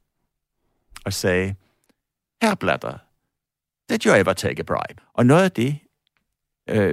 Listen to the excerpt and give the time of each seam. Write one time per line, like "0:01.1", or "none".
0:05.0